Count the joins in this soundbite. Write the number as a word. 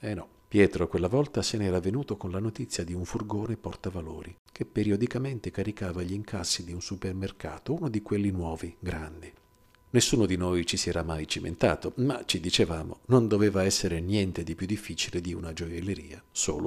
one